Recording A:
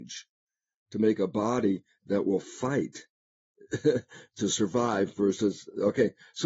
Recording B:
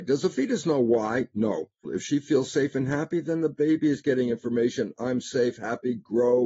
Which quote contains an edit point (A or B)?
B